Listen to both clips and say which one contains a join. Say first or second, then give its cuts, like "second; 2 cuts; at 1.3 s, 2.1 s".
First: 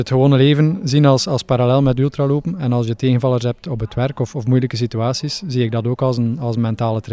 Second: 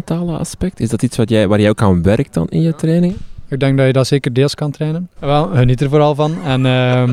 second; 1 cut; at 5.2 s